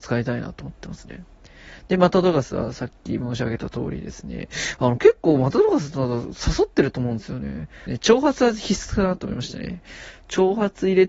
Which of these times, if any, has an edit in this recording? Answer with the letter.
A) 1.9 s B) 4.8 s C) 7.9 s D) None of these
C